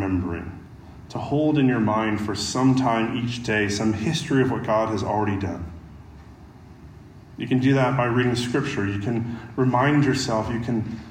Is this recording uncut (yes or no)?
yes